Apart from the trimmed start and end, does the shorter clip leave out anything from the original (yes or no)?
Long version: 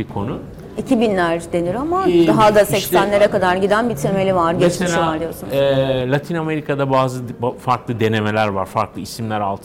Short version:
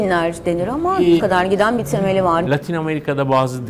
yes